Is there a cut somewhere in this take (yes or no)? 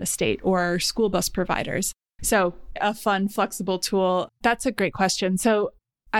yes